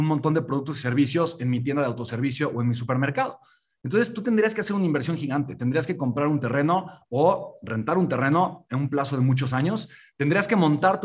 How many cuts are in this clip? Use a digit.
0